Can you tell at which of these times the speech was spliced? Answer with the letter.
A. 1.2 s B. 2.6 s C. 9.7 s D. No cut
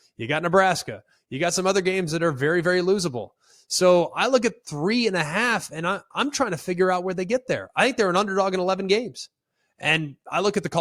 D